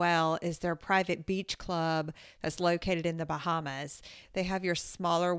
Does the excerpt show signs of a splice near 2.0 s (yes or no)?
no